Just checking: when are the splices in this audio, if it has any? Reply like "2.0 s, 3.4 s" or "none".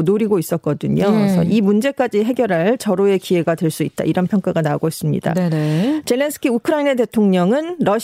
none